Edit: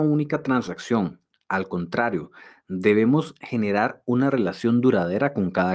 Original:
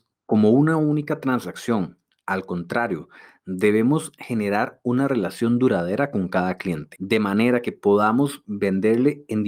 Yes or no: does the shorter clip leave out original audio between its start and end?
no